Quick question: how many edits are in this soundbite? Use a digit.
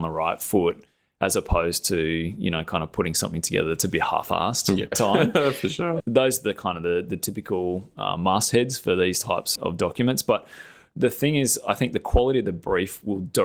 3